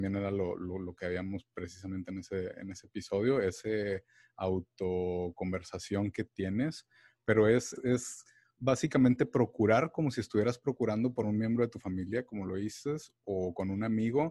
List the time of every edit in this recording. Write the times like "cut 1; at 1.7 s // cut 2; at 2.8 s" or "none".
cut 1; at 7.8 s

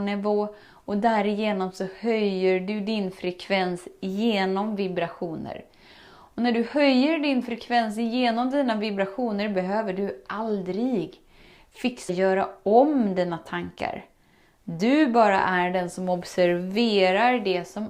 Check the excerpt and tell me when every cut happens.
cut 1; at 12.1 s

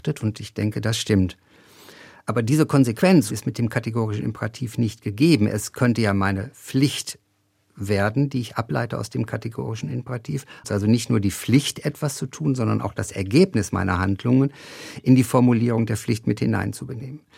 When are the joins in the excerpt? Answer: cut 1; at 10.6 s

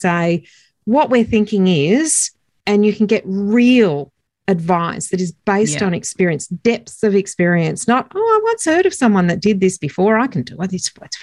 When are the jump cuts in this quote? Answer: none

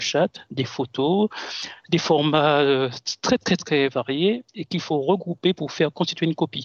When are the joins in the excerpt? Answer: none

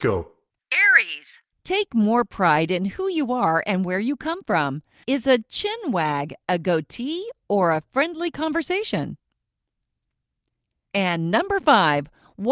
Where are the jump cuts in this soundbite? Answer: cut 1; at 5.0 s

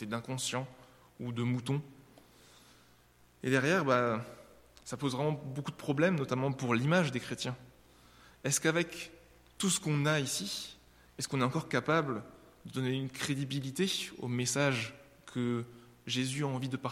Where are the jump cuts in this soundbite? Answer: none

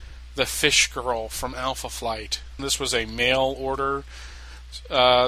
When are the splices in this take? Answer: cut 1; at 2.6 s

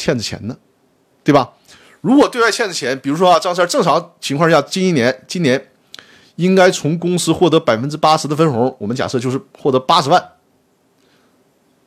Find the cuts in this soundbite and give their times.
none

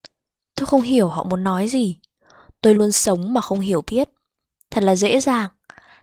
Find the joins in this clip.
cut 1; at 2.8 s

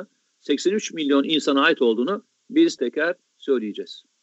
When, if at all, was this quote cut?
cut 1; at 2.8 s

